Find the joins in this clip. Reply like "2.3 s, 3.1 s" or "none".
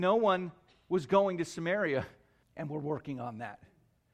2.4 s